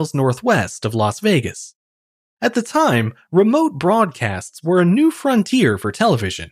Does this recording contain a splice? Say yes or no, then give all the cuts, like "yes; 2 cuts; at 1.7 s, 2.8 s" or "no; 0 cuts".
yes; 1 cut; at 2.2 s